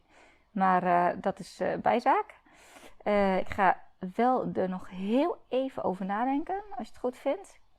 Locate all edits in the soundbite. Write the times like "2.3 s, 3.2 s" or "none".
3.4 s

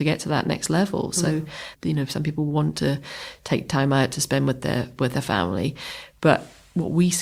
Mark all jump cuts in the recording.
1.7 s

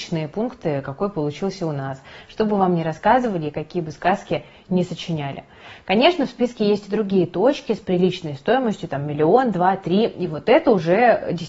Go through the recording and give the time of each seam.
none

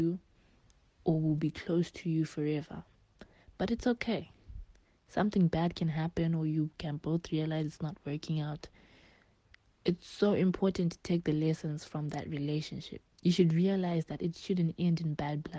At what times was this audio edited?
13.0 s

